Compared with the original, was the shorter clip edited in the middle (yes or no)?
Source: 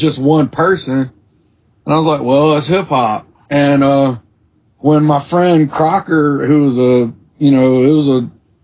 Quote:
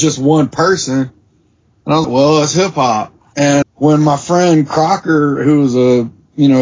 yes